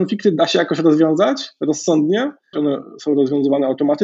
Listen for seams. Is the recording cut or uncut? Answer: cut